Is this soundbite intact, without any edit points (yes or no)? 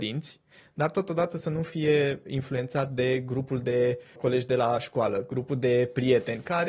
no